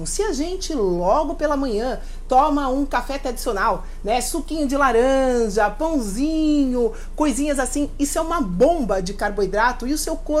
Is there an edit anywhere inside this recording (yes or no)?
no